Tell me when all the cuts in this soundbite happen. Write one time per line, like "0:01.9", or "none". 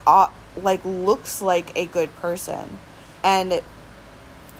0:03.2